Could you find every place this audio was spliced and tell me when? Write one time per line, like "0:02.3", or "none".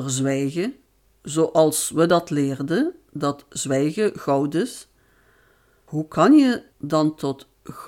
none